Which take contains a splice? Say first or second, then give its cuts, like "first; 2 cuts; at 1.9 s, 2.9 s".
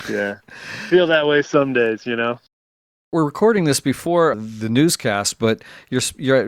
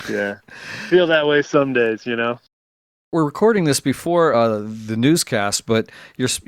first; 1 cut; at 4.3 s